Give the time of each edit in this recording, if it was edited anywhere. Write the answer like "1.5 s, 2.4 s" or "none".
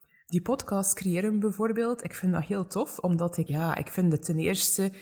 3.5 s